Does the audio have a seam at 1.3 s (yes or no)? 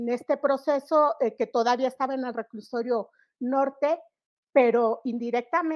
no